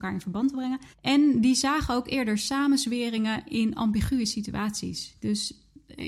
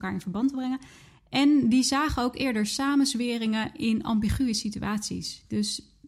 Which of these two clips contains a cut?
first; 1 cut; at 0.9 s

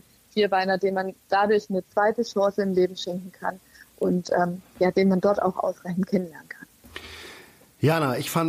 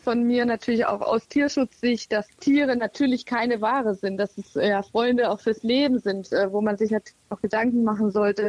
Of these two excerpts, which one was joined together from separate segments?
second; 1 cut; at 2.3 s

